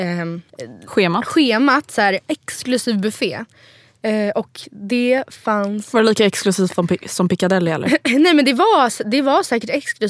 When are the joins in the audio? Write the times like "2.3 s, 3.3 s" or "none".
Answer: none